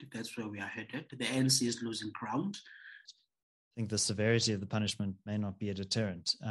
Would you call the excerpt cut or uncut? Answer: cut